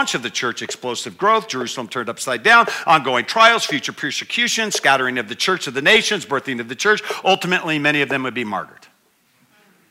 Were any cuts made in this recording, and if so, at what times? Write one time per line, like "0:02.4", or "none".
none